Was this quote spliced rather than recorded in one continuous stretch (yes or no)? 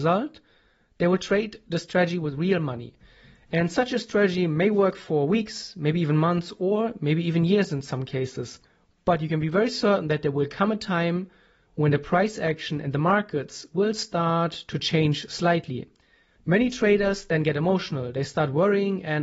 yes